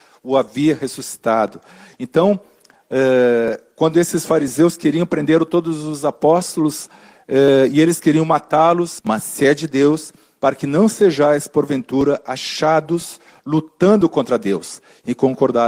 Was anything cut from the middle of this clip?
yes; 2 cuts; at 9.0 s, 10.4 s

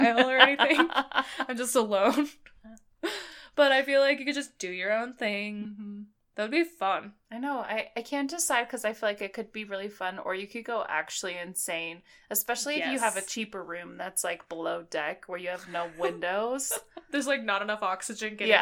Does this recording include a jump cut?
no; 0 cuts

